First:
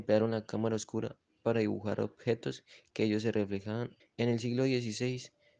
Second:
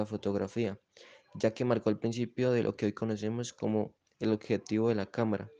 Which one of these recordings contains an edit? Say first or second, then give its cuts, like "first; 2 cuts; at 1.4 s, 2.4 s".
first; 1 cut; at 4.0 s